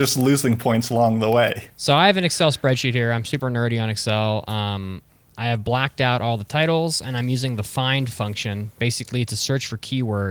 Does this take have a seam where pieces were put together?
no; 0 cuts

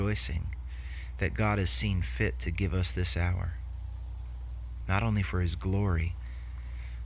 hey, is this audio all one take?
yes; 0 cuts

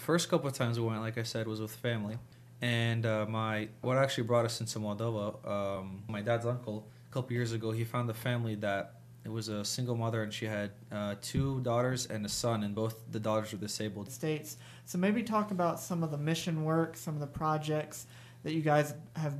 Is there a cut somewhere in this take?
yes; 1 cut; at 14.1 s

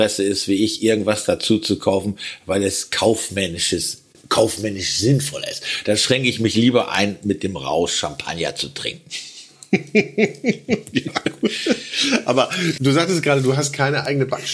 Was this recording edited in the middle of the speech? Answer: yes; 1 cut; at 12.8 s

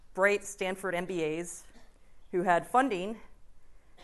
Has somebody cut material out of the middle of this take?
no; 0 cuts

